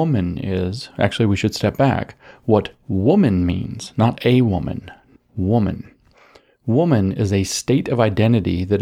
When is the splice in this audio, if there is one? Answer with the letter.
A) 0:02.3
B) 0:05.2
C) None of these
B